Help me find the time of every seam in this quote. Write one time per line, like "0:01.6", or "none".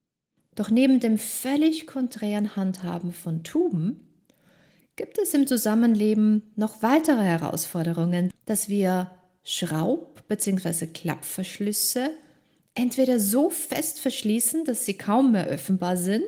0:08.3